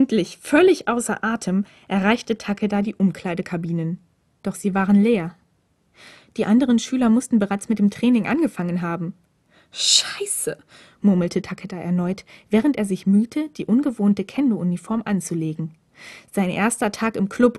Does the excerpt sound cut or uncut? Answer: uncut